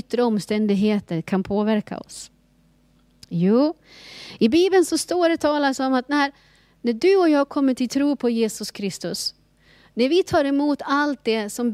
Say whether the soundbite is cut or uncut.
uncut